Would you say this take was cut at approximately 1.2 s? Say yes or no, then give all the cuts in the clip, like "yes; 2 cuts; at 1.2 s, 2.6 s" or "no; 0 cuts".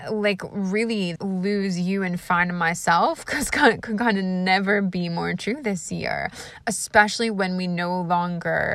yes; 1 cut; at 1.2 s